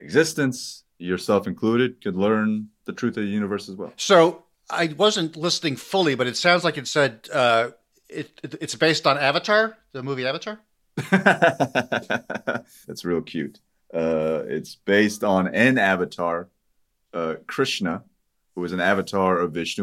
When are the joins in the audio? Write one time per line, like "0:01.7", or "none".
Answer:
0:12.8